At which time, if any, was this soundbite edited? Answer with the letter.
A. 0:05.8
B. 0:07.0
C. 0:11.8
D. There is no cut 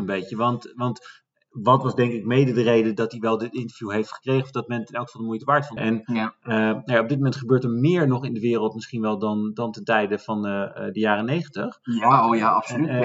A